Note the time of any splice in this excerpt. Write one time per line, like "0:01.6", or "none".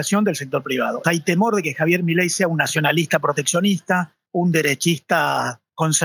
0:01.0

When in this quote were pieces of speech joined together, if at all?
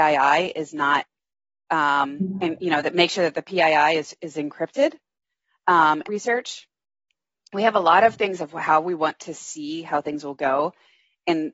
0:06.0

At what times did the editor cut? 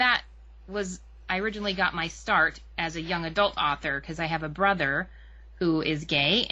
none

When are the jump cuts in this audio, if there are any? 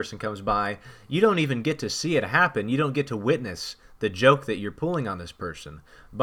none

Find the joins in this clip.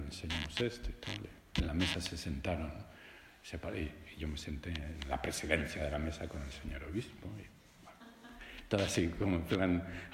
none

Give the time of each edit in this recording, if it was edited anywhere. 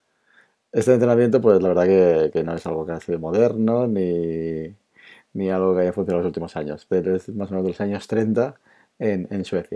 0:06.9

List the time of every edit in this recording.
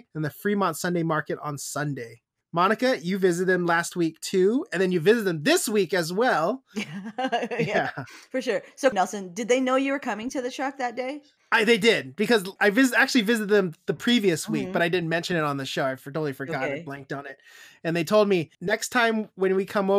0:08.9

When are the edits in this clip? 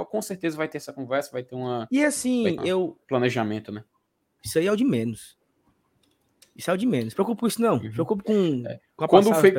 0:02.6
0:04.4

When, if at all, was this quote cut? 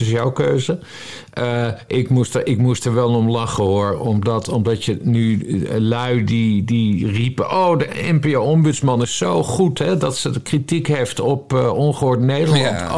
none

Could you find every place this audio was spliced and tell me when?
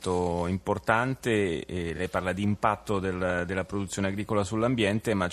none

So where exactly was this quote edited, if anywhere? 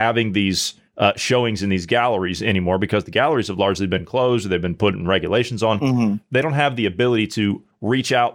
none

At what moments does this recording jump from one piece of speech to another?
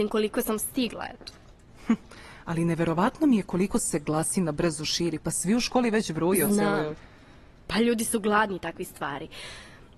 none

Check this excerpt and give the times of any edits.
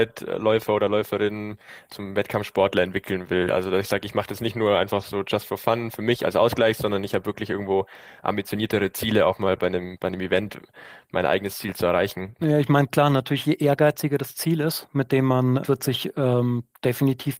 0:12.4
0:15.6

